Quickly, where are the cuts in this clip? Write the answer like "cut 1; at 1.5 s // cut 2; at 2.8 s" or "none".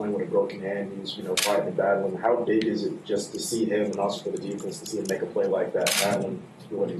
none

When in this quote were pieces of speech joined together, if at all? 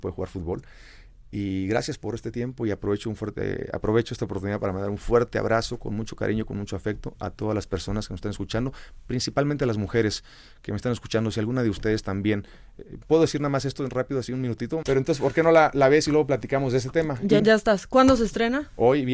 cut 1; at 14.8 s // cut 2; at 17.4 s

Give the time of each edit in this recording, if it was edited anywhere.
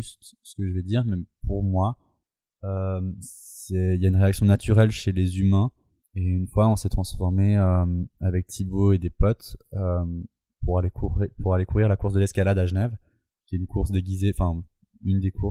cut 1; at 6.0 s

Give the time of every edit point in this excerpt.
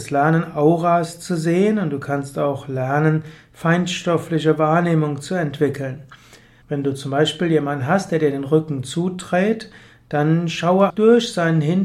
cut 1; at 6.6 s // cut 2; at 10.9 s

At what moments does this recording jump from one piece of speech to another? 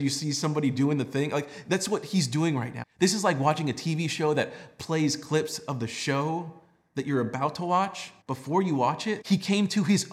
cut 1; at 2.8 s // cut 2; at 8.2 s // cut 3; at 9.2 s

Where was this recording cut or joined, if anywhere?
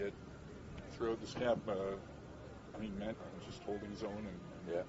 cut 1; at 3.1 s

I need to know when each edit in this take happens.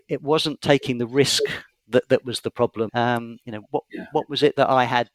cut 1; at 2.9 s

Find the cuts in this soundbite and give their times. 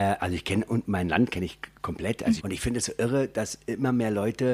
cut 1; at 2.4 s

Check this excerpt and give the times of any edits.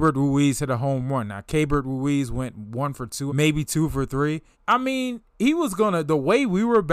cut 1; at 3.3 s // cut 2; at 4.5 s

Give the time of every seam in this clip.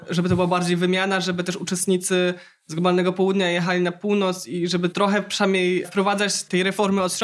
none

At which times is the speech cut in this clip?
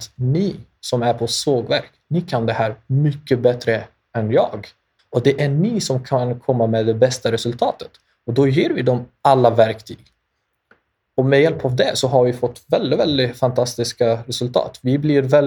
cut 1; at 5.0 s

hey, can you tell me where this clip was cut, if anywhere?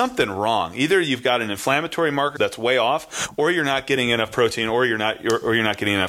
cut 1; at 2.3 s

